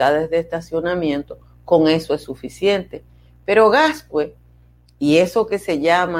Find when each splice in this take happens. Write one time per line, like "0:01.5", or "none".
none